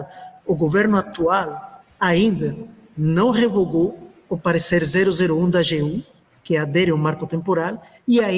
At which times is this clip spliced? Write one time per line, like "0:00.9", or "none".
none